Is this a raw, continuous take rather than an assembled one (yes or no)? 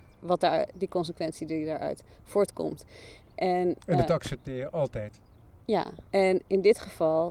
no